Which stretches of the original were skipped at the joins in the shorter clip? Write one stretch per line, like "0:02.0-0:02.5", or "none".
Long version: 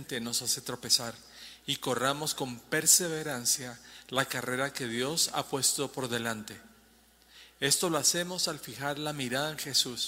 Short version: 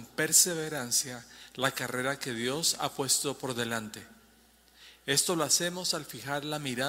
none